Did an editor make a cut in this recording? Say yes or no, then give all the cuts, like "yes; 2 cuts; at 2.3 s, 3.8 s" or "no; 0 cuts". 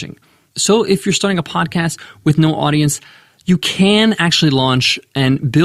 no; 0 cuts